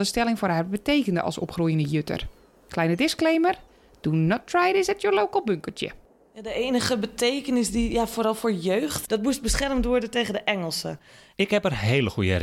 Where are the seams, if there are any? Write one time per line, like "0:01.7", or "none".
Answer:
0:09.0
0:11.3